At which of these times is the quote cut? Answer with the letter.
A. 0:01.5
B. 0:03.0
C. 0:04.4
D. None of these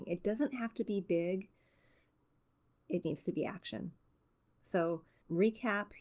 B